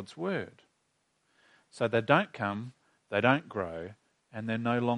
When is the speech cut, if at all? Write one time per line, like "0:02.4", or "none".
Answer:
none